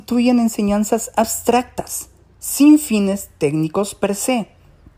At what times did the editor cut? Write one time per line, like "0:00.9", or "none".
none